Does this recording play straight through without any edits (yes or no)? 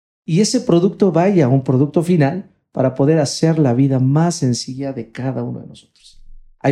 yes